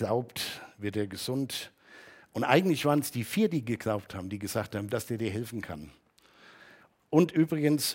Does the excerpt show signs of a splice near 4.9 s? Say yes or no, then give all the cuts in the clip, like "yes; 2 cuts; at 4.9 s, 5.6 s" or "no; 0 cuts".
yes; 1 cut; at 4.9 s